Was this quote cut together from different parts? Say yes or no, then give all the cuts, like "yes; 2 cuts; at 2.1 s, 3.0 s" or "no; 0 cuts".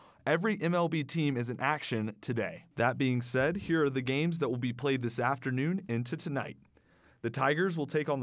yes; 1 cut; at 2.7 s